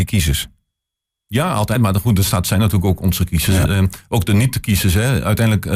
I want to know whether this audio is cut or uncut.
uncut